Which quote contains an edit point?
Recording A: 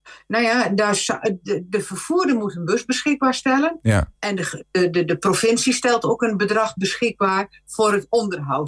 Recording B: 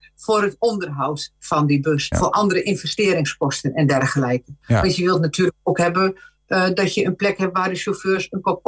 B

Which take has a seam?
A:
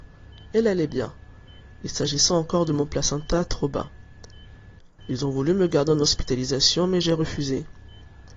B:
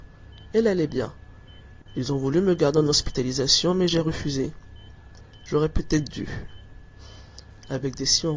B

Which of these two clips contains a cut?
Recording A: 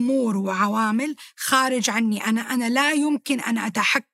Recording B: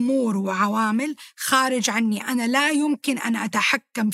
B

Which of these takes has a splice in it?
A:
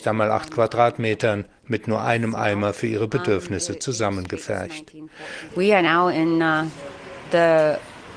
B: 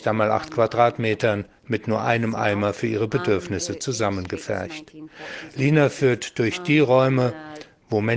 A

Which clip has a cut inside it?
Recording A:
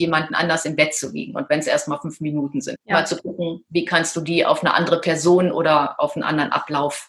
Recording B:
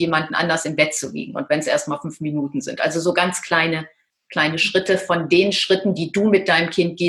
A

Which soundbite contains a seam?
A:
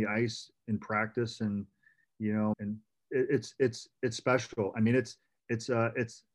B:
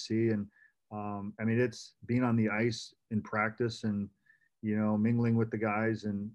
A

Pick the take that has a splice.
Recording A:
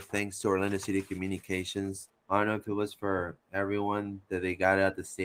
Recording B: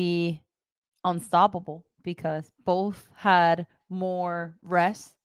A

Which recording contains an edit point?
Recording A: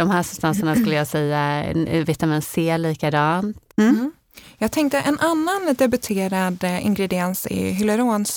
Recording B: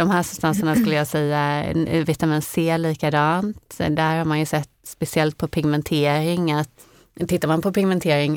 A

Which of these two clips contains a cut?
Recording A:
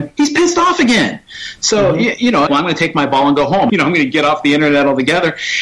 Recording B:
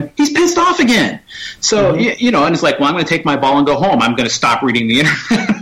A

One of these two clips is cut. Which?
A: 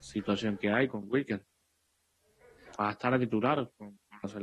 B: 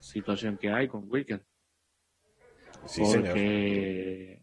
A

